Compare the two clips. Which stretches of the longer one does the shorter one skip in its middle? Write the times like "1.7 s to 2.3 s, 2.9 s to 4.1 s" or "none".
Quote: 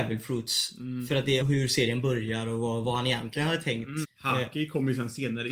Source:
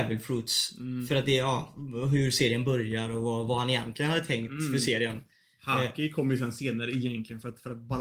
1.4 s to 2.0 s, 4.7 s to 5.5 s